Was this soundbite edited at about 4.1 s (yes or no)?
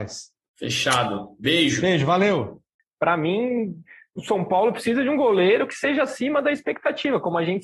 no